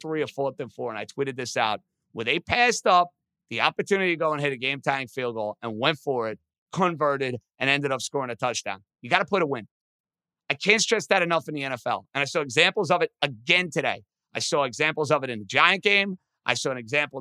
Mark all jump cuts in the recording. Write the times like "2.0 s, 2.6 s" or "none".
none